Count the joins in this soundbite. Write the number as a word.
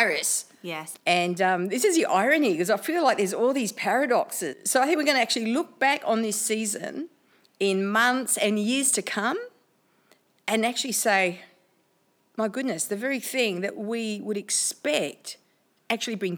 two